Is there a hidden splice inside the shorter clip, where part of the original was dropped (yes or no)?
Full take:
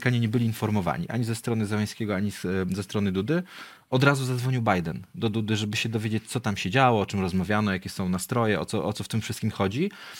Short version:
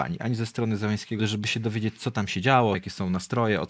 yes